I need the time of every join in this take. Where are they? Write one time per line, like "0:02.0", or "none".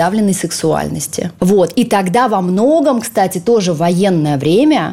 0:01.4